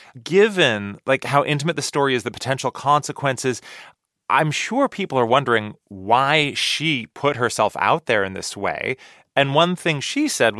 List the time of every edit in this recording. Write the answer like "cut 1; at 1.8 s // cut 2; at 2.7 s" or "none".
none